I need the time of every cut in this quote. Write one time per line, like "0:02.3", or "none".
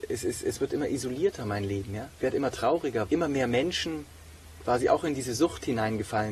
0:03.1